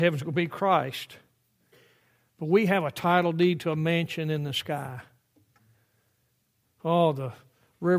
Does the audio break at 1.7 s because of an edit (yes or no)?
no